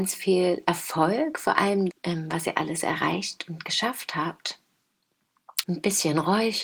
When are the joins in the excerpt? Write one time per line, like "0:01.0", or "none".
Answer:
0:01.9
0:05.6